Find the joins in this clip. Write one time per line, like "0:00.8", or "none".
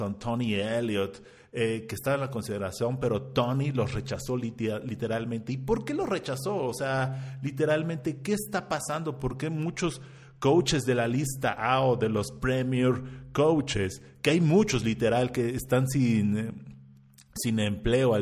none